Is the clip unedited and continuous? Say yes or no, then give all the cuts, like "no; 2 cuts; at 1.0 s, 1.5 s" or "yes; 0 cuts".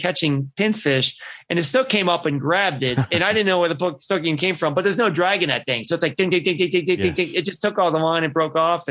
yes; 0 cuts